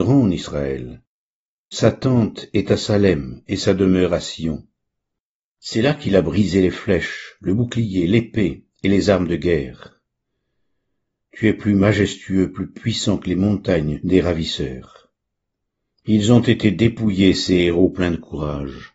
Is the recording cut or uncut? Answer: uncut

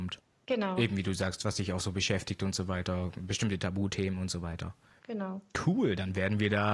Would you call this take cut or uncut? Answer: uncut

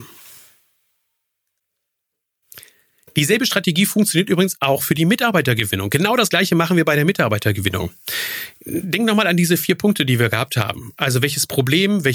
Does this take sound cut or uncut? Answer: uncut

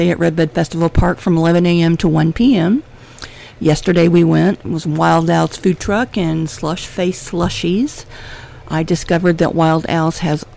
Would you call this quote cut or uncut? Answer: uncut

